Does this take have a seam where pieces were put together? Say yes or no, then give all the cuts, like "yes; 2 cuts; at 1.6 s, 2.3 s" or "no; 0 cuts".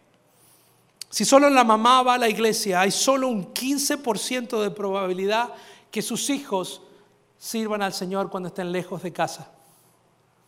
no; 0 cuts